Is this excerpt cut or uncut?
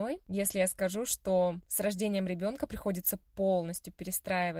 uncut